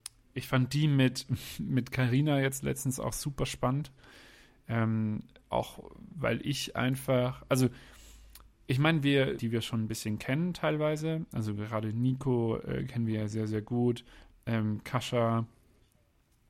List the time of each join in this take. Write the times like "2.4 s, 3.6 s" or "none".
9.4 s